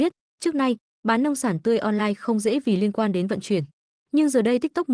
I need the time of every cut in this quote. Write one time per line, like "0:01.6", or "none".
0:03.9